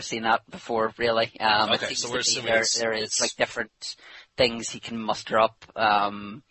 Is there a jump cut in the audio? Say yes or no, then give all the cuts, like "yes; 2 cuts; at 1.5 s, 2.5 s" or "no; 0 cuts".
no; 0 cuts